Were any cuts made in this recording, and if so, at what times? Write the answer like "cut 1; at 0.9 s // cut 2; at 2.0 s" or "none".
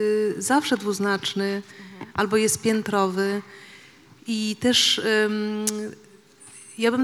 none